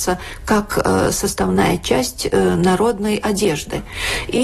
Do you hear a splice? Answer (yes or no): no